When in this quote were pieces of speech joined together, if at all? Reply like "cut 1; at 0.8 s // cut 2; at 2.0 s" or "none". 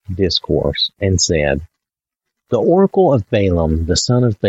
cut 1; at 0.9 s